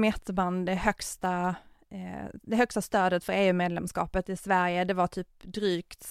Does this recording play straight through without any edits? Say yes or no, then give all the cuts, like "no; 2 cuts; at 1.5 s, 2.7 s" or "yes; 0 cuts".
yes; 0 cuts